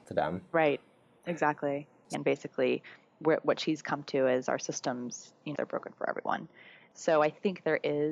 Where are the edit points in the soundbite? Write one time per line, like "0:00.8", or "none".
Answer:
0:02.1
0:05.5